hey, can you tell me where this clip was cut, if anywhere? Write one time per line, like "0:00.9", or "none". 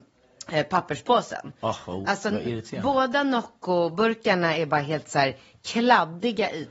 none